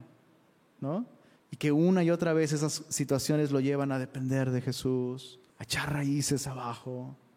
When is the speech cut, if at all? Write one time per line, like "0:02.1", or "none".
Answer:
0:01.4
0:05.5